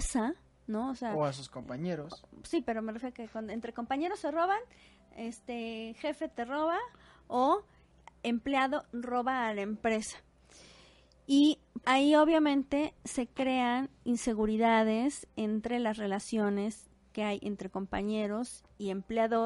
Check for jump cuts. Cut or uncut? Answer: cut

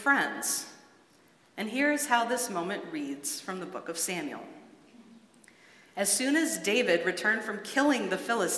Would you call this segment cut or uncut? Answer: uncut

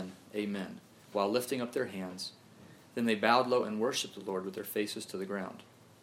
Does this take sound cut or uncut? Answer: uncut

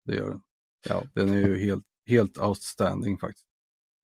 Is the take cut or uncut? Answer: uncut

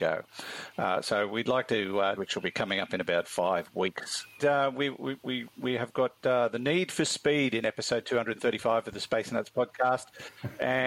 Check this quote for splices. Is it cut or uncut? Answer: cut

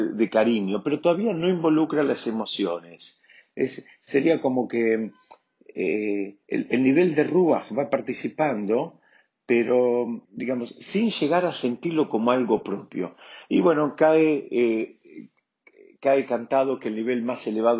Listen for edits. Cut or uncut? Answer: cut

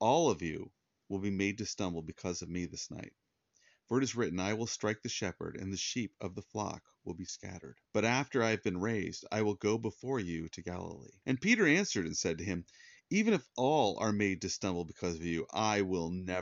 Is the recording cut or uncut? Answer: cut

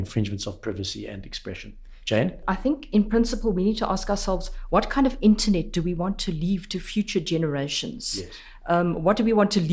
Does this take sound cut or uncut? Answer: uncut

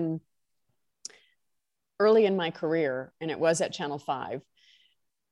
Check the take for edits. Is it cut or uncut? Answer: uncut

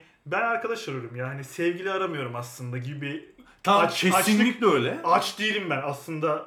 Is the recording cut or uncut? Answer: uncut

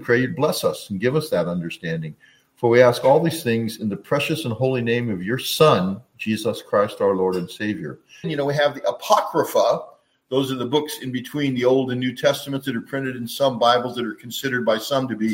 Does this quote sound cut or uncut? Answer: cut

